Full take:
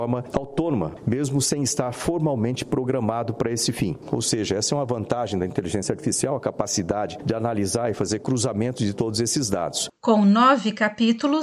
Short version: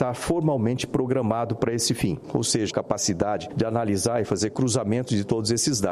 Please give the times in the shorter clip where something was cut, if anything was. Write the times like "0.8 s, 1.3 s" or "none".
2.7 s